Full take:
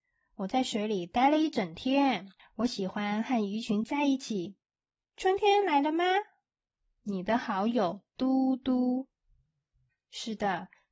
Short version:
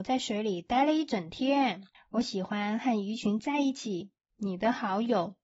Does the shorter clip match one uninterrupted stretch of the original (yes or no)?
no